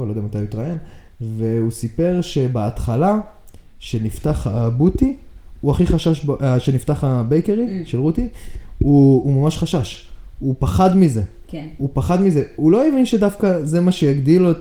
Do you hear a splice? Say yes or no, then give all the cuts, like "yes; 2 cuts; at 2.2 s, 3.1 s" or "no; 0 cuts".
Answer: no; 0 cuts